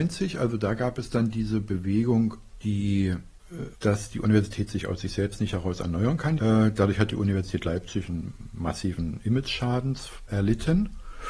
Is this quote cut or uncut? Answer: cut